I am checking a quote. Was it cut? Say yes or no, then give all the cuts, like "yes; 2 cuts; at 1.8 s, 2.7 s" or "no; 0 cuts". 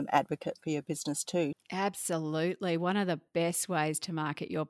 yes; 1 cut; at 1.5 s